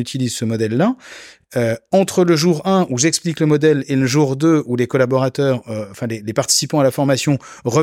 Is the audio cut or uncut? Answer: uncut